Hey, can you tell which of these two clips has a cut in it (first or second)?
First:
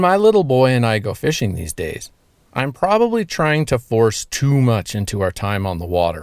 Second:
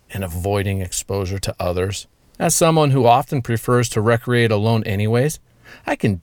second